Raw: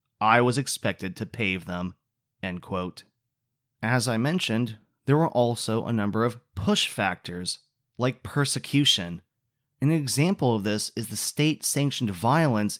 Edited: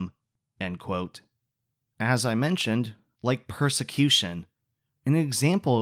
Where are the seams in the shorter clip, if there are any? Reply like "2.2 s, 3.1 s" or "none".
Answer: 3.1 s